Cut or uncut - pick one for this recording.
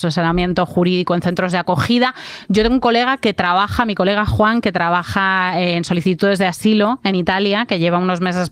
uncut